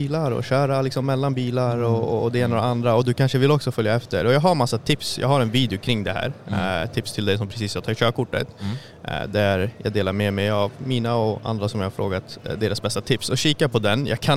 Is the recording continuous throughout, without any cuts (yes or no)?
yes